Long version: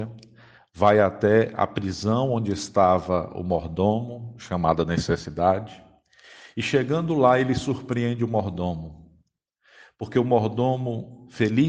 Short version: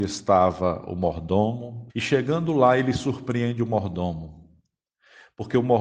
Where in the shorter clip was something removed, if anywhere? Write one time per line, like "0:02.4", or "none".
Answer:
0:01.9